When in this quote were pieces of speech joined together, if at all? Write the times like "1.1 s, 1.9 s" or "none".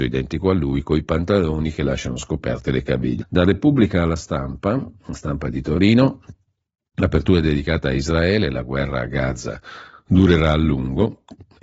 3.2 s